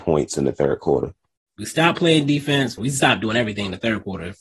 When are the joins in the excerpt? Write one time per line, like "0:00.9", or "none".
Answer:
0:02.8